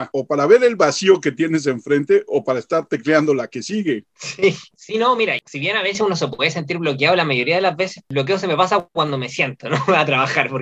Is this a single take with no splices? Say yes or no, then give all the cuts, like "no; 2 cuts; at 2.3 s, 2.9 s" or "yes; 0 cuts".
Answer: no; 2 cuts; at 5.4 s, 8.0 s